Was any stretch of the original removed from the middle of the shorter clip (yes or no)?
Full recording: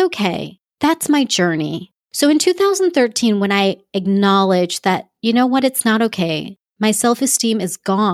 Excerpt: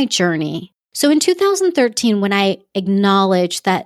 no